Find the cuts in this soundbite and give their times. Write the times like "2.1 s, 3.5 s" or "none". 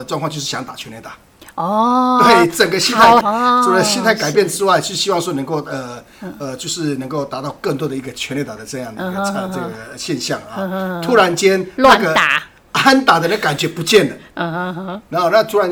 3.2 s